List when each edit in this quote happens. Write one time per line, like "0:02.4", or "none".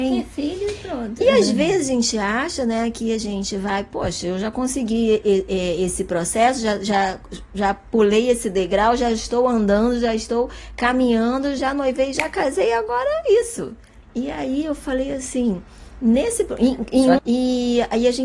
0:11.6
0:14.0
0:17.2